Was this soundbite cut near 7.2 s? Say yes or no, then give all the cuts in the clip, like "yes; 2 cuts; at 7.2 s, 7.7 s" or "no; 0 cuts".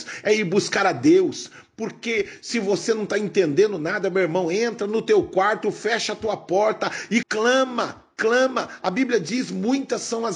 yes; 1 cut; at 7.2 s